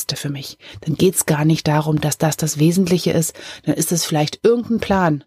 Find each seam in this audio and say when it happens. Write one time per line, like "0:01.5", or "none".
none